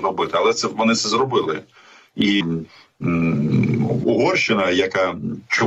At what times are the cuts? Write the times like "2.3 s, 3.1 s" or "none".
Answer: 2.4 s, 4.0 s